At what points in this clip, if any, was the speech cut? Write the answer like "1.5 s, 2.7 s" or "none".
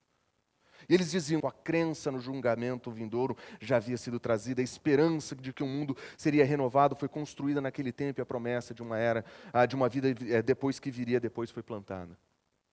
1.4 s